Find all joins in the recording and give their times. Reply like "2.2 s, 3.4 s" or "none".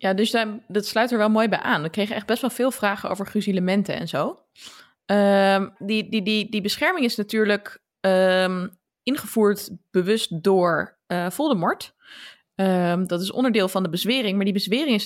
5.8 s